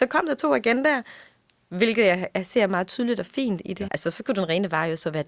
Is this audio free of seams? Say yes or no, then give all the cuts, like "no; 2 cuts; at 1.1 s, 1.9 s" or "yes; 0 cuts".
no; 1 cut; at 3.9 s